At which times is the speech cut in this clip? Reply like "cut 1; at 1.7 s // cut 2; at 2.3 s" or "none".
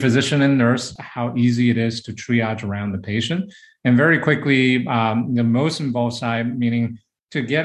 cut 1; at 1.0 s